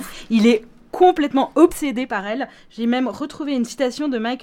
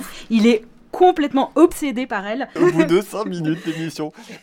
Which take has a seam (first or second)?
second